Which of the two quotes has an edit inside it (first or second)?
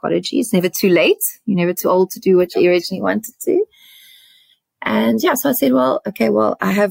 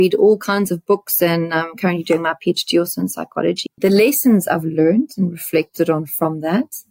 second